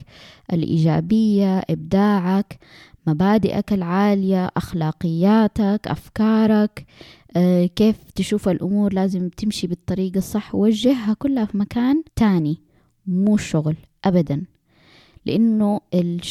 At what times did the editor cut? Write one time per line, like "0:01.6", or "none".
0:12.1